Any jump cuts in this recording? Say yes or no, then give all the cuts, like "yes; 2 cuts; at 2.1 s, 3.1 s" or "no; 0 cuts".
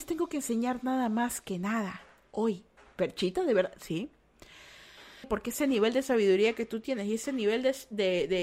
yes; 1 cut; at 5.2 s